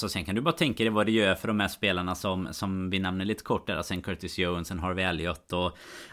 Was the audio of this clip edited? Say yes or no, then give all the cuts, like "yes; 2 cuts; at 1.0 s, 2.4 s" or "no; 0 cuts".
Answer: no; 0 cuts